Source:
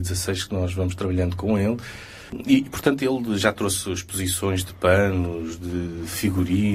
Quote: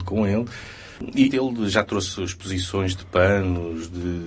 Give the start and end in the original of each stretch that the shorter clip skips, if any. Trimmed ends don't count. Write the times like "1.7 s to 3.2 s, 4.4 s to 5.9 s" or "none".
2.6 s to 3.0 s